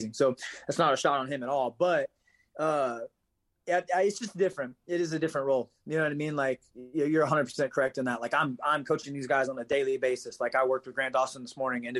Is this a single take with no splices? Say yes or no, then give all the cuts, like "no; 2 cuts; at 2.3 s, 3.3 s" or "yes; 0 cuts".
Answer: yes; 0 cuts